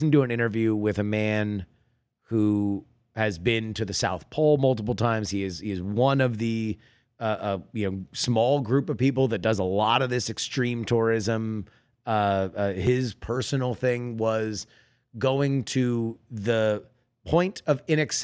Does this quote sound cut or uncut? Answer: uncut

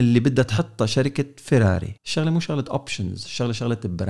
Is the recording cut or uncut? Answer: cut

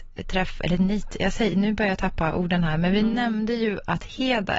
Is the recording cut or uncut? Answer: uncut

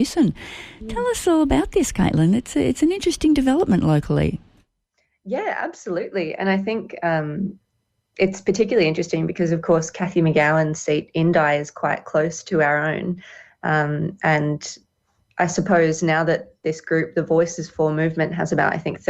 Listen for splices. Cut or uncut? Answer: uncut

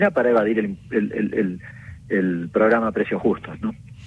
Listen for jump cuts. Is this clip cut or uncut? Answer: uncut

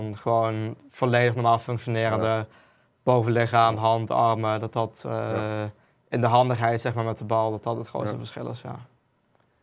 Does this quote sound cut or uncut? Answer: uncut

